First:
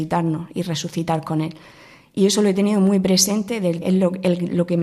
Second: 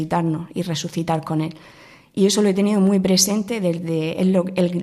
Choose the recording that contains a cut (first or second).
first